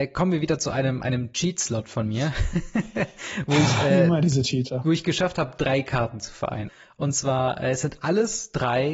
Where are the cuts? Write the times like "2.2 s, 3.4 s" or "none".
6.7 s